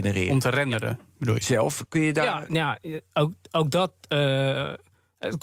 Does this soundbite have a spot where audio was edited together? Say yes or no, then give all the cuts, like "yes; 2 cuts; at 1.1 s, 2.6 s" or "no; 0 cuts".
no; 0 cuts